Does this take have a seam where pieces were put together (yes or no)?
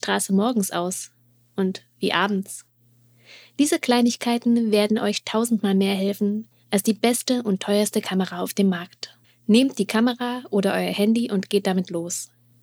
yes